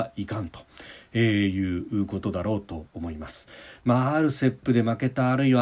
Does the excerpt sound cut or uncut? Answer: uncut